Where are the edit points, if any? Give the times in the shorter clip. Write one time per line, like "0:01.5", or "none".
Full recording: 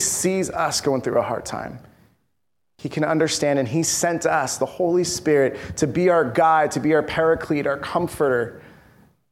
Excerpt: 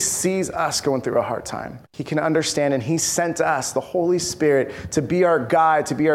0:01.8